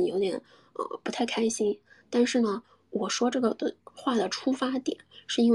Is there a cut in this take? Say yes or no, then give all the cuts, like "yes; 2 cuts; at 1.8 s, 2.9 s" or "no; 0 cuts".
no; 0 cuts